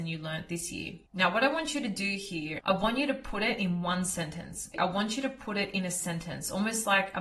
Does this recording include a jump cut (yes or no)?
yes